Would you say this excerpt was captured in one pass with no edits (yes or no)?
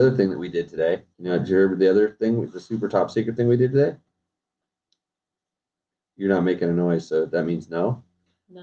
no